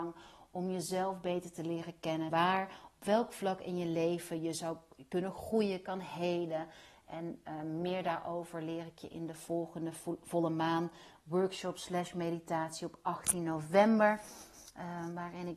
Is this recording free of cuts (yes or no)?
no